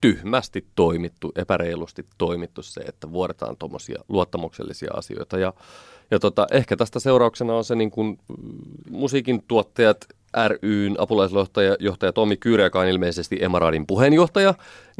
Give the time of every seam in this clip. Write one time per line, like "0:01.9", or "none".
none